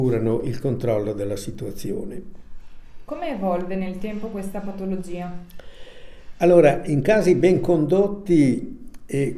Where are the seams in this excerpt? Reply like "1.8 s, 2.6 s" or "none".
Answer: none